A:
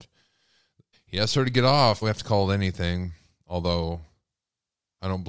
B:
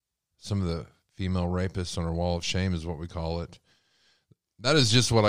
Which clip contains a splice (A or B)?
A